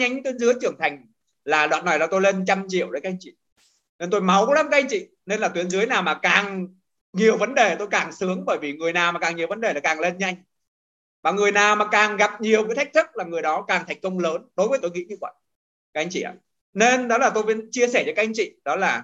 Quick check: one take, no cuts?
no; 1 cut; at 14.8 s

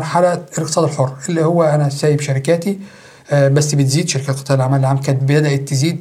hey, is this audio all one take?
yes; 0 cuts

